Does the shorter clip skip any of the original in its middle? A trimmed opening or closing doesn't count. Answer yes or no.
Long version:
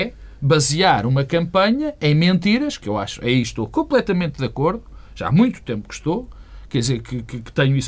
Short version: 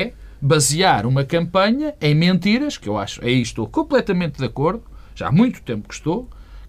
no